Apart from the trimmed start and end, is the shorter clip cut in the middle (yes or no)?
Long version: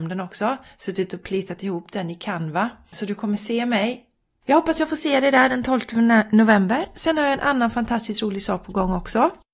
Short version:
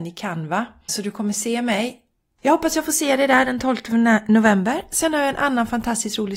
no